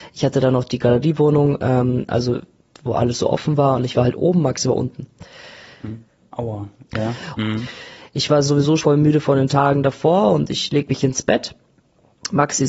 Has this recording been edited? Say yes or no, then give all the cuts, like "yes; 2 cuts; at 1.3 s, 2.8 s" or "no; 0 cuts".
yes; 3 cuts; at 6.2 s, 7.4 s, 8.8 s